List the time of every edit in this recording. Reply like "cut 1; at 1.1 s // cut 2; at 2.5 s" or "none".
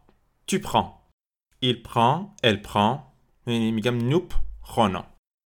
cut 1; at 3.3 s